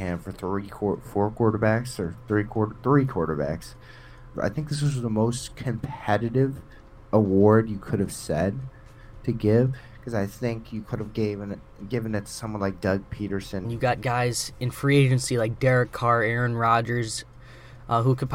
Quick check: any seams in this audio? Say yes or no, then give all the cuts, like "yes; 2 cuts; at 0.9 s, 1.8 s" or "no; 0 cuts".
yes; 2 cuts; at 4.3 s, 13.6 s